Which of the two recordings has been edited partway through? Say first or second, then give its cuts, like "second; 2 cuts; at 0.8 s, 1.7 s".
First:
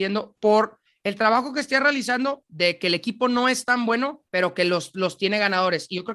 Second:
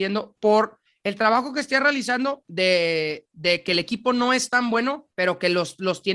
first; 1 cut; at 2.4 s